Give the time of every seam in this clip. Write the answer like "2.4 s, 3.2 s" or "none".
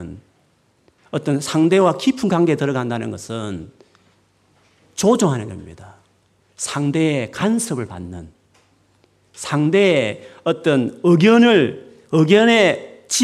none